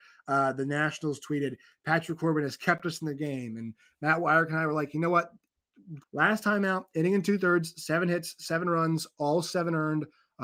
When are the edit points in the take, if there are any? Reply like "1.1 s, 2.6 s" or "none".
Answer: 6.0 s